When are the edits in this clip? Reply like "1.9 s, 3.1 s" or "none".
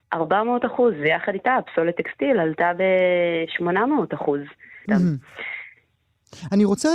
4.9 s